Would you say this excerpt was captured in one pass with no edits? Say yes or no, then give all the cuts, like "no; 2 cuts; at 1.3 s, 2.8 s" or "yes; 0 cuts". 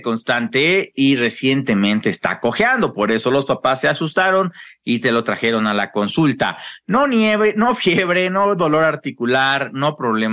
yes; 0 cuts